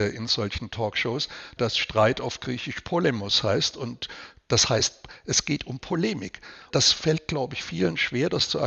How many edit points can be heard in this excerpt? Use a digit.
2